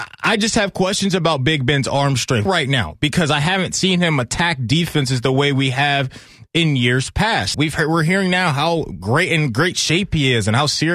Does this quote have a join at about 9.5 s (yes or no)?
no